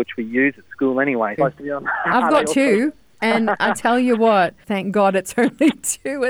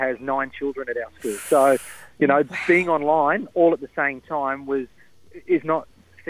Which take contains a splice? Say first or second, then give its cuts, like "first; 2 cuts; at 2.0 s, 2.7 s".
first; 2 cuts; at 1.4 s, 4.6 s